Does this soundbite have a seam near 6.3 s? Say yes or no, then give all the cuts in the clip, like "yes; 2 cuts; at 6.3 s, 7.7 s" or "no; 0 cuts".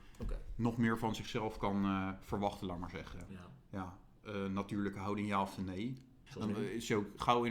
yes; 2 cuts; at 3.3 s, 6.3 s